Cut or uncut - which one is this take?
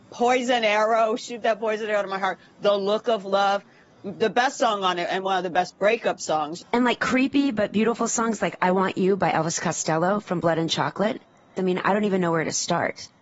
cut